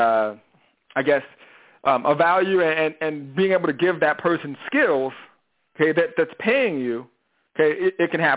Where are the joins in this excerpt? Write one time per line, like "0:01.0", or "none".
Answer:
none